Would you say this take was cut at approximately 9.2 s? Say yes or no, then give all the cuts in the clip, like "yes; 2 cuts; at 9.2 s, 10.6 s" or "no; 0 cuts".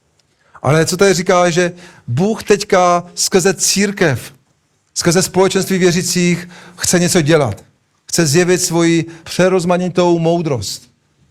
yes; 1 cut; at 9.2 s